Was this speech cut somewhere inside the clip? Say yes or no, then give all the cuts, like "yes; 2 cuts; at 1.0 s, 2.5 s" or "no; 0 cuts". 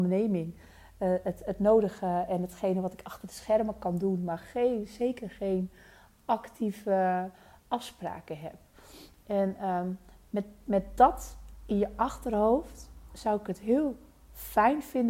no; 0 cuts